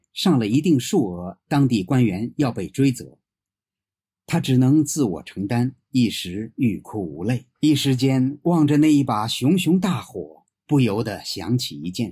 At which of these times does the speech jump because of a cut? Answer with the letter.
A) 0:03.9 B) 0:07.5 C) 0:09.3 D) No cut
B